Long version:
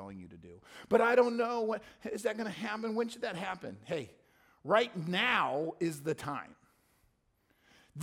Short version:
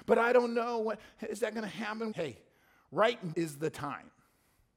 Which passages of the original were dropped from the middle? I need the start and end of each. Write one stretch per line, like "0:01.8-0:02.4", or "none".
0:02.9-0:03.8
0:05.0-0:05.8